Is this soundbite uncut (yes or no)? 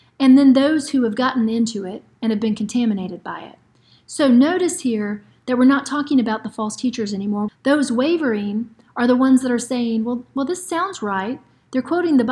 no